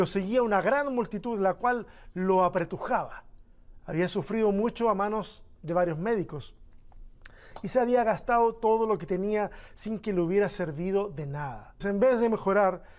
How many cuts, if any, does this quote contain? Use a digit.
2